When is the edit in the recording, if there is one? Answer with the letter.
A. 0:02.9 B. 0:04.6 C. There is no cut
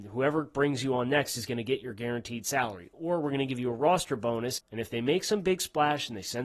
B